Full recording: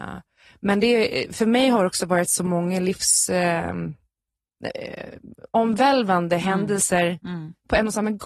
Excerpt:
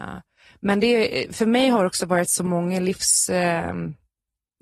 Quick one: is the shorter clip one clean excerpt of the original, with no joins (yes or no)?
yes